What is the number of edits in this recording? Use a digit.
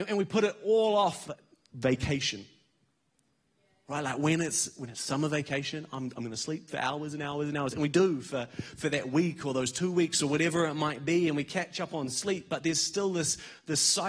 1